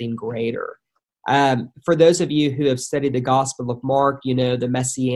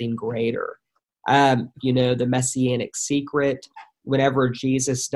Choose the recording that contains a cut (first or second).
second